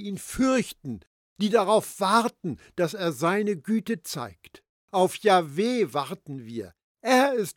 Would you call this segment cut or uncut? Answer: cut